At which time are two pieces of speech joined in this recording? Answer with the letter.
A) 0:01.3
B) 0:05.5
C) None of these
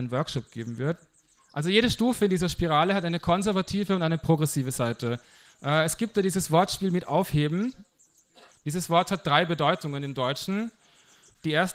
C